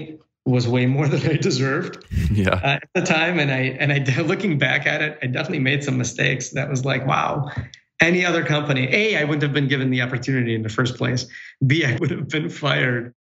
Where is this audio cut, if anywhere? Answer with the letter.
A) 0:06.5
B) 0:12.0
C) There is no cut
B